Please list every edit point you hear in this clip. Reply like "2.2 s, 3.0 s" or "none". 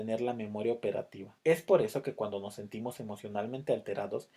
1.4 s